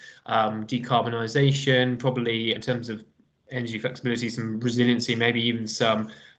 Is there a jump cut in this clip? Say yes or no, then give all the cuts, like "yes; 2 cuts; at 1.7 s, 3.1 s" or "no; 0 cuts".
yes; 1 cut; at 2.6 s